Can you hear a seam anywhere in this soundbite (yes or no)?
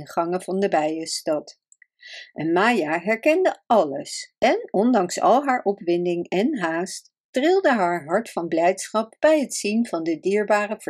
no